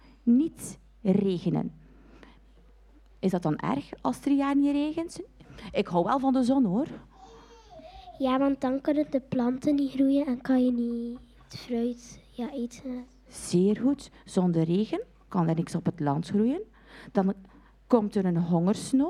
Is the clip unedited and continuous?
yes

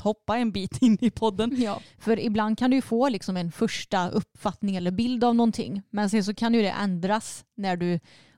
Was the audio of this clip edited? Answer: yes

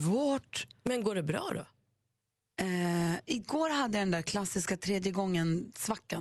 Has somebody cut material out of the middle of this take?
no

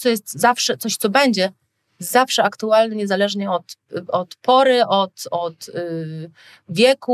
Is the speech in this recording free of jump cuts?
yes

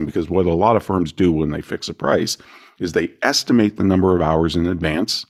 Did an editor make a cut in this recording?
no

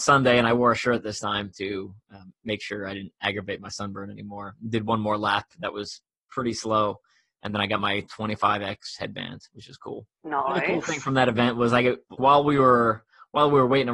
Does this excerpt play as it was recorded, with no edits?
no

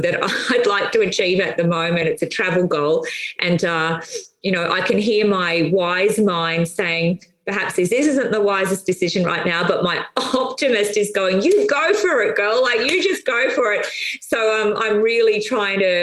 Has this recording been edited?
no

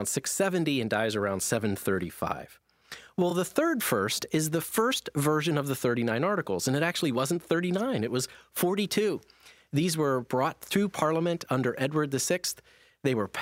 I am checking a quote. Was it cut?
no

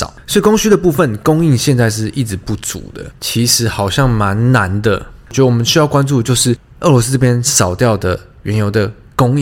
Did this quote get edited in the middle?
yes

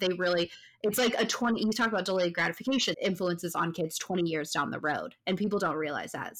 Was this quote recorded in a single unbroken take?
no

